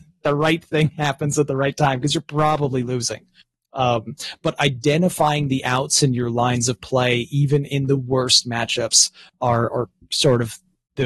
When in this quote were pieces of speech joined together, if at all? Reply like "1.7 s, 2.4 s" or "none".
none